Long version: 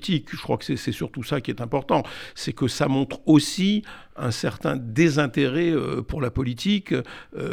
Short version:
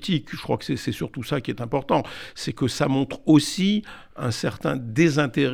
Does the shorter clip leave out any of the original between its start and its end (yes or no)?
no